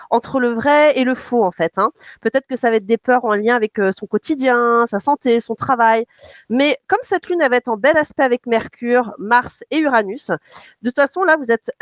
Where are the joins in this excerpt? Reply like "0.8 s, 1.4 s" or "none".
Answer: 6.4 s